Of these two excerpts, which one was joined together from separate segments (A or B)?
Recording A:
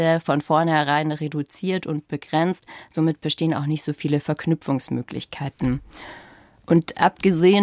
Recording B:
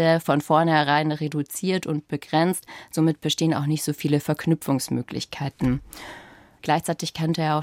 B